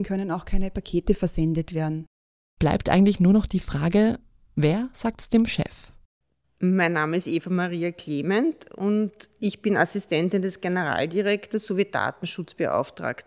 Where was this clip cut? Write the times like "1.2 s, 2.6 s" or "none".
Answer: none